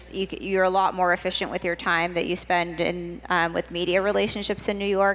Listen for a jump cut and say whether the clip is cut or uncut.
uncut